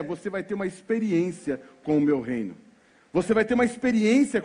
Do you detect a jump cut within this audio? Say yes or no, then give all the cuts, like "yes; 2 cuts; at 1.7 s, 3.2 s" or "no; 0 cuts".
no; 0 cuts